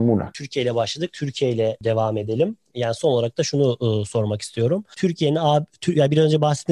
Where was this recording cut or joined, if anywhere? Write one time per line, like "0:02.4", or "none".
none